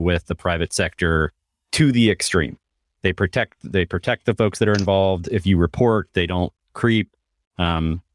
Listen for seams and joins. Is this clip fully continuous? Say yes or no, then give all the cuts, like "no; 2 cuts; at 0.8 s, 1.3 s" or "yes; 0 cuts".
yes; 0 cuts